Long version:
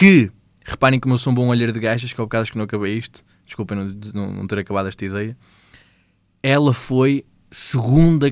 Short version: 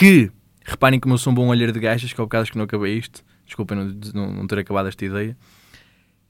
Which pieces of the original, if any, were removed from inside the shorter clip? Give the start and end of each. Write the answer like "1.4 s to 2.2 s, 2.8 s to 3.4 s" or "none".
none